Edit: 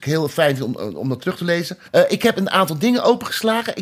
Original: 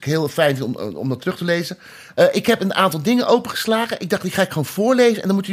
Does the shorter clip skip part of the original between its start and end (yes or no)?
yes